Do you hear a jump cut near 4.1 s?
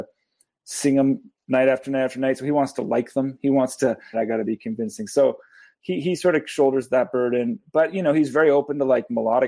yes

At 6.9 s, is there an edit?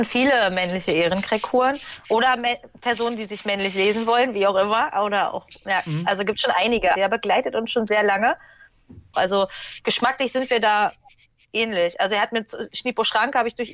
yes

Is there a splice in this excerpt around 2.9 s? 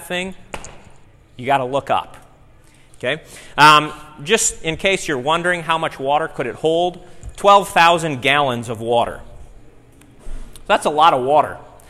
yes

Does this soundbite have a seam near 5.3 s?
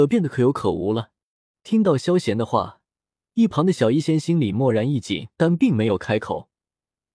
yes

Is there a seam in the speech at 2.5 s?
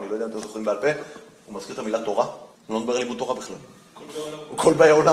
yes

